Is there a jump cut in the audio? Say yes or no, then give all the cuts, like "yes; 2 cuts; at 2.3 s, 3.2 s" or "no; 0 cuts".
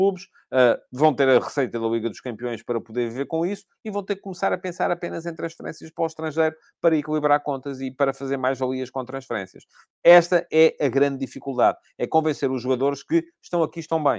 no; 0 cuts